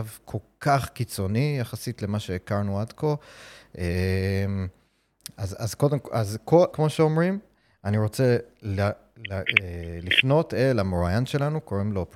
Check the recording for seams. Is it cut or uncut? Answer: cut